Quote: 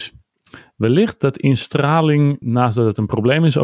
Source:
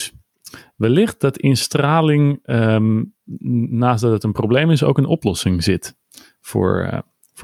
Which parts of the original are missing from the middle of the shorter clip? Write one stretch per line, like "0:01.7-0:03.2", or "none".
0:02.4-0:03.7